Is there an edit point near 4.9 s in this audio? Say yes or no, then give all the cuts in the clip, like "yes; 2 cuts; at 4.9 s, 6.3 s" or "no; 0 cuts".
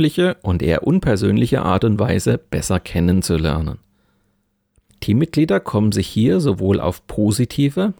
yes; 1 cut; at 4.9 s